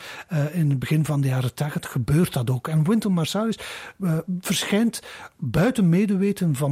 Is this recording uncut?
yes; 0 cuts

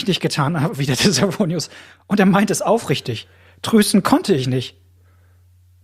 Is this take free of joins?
yes; 0 cuts

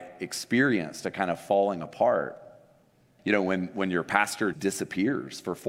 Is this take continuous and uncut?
no; 2 cuts; at 3.2 s, 4.5 s

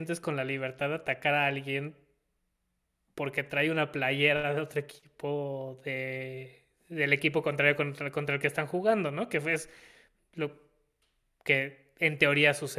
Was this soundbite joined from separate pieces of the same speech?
no; 0 cuts

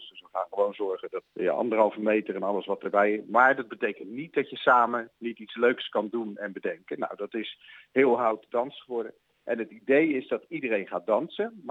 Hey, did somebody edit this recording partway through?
yes; 1 cut; at 1.3 s

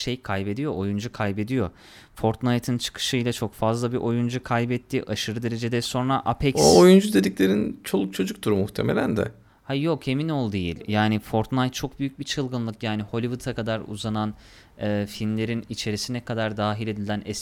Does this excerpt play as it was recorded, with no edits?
yes; 0 cuts

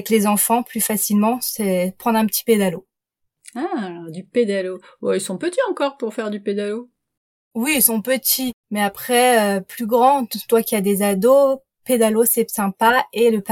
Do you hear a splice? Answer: no; 0 cuts

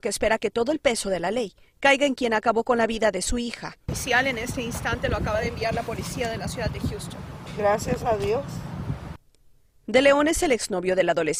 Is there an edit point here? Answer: yes; 1 cut; at 3.8 s

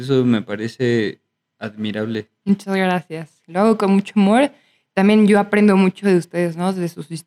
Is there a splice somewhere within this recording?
no; 0 cuts

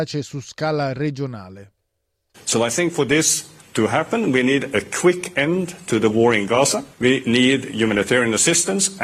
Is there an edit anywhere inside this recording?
yes; 1 cut; at 2.3 s

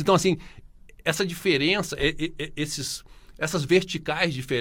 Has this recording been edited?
no; 0 cuts

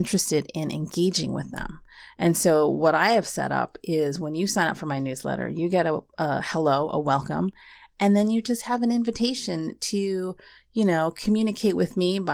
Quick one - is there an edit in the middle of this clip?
no; 0 cuts

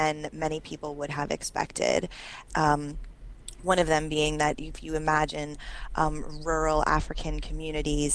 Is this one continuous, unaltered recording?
no; 1 cut; at 2.5 s

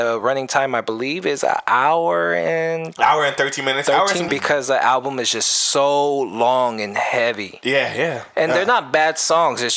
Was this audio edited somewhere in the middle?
yes; 1 cut; at 4.3 s

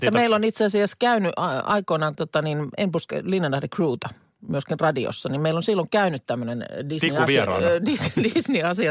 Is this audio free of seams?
no; 1 cut; at 2.1 s

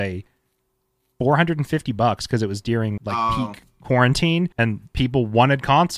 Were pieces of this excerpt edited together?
yes; 2 cuts; at 3.0 s, 4.5 s

